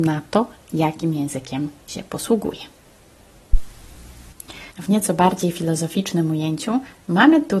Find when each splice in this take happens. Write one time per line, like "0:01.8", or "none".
0:04.7

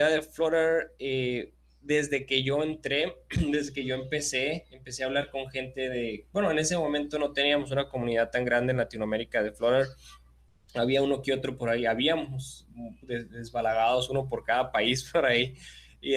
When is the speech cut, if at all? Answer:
none

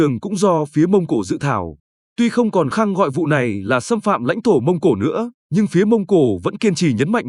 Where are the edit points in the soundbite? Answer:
0:02.7
0:05.4

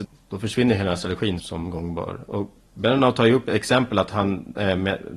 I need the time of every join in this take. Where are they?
0:01.4

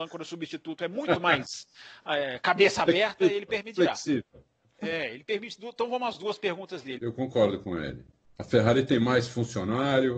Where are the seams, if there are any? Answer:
0:07.0
0:08.2

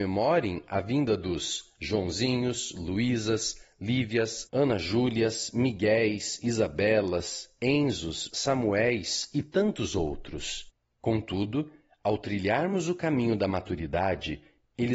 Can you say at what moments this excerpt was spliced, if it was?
0:08.3
0:11.0

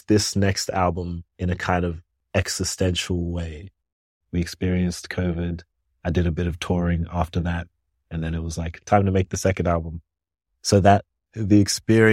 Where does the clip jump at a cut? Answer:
0:04.2

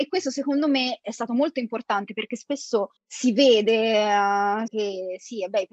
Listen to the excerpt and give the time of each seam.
0:03.0
0:04.7

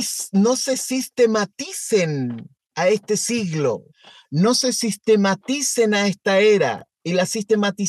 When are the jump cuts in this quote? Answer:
none

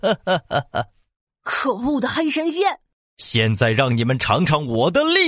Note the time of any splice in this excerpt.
none

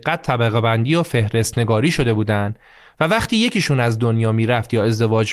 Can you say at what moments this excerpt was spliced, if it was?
none

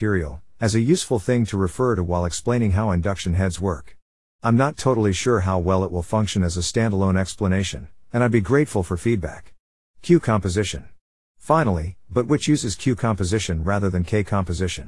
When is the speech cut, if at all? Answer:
0:12.1

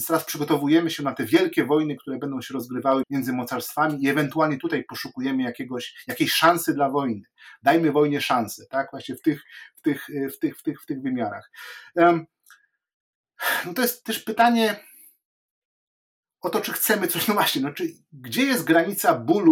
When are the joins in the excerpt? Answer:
0:03.0

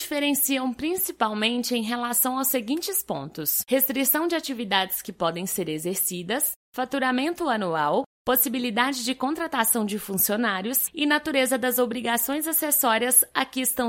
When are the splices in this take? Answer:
none

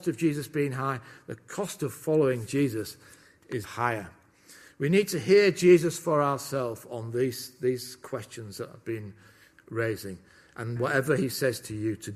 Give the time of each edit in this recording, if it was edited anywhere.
0:03.6
0:08.8
0:10.8

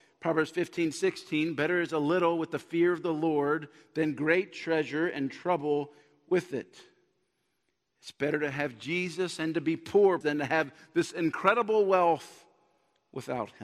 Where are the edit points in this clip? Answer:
0:10.2

